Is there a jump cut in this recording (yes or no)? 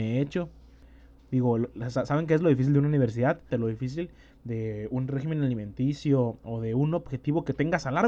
yes